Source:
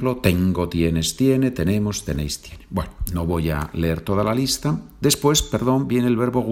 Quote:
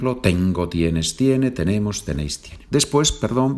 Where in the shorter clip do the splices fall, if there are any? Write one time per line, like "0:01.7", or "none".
0:02.7